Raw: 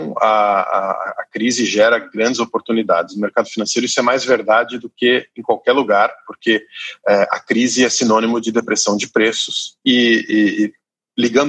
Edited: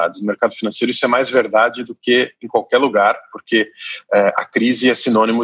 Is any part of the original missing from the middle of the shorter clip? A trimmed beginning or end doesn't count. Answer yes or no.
no